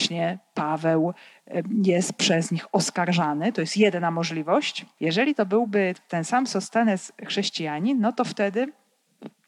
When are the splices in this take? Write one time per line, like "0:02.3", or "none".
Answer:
0:05.0